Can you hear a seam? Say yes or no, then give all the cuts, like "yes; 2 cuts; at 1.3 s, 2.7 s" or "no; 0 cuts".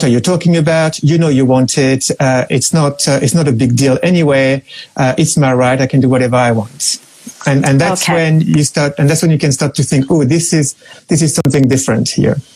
no; 0 cuts